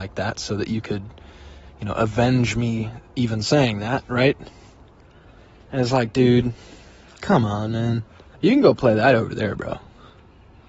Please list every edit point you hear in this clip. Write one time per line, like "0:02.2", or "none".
0:08.3